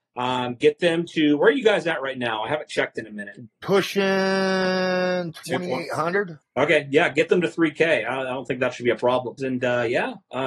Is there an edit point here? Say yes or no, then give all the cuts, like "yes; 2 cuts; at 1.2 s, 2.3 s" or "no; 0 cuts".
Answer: yes; 2 cuts; at 6.4 s, 9.4 s